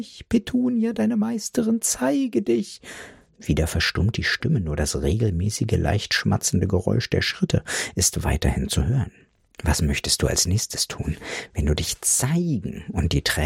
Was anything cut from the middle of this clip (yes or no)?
no